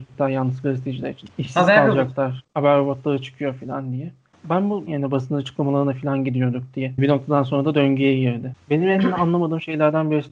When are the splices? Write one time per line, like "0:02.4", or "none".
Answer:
0:04.9

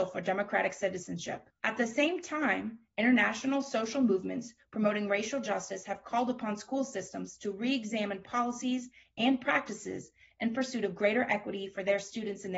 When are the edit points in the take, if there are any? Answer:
0:01.6

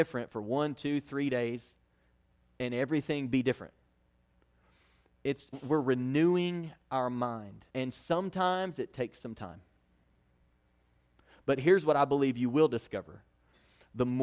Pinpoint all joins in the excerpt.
0:05.5
0:07.7

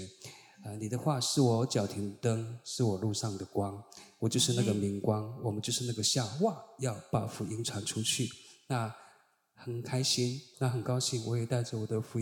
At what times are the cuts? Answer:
0:10.5

